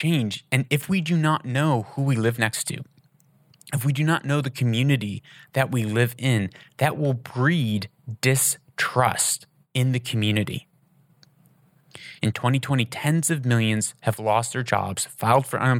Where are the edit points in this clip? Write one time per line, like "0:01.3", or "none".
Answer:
0:12.2